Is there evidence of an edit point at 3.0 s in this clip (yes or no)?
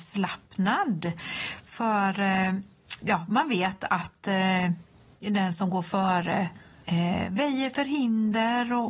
yes